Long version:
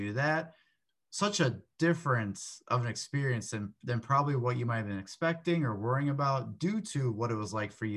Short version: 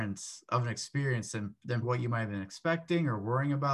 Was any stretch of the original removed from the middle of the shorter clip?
yes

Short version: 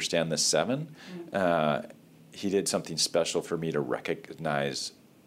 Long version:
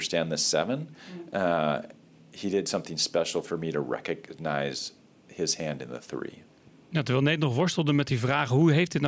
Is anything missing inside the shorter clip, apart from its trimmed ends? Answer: no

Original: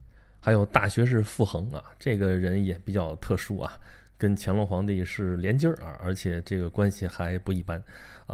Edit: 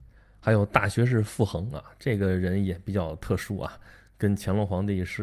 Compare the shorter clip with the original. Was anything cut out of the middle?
no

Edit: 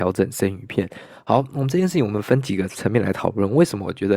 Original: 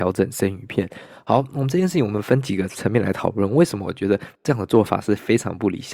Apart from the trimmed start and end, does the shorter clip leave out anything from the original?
no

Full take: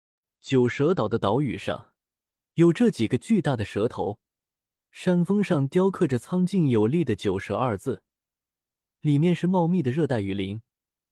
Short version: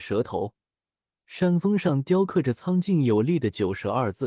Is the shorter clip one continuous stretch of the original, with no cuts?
yes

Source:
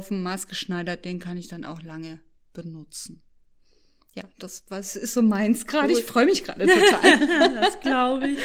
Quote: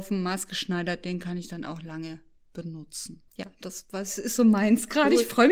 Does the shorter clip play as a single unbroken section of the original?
no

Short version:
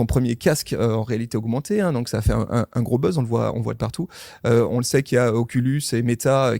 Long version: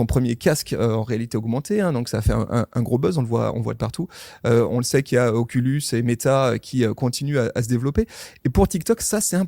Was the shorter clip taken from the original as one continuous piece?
yes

